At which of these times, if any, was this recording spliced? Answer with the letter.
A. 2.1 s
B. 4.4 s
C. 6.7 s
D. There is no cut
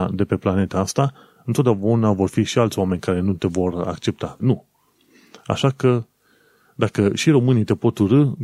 B